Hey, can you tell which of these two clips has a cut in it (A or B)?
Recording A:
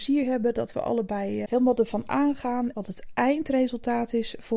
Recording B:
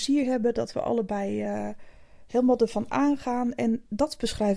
A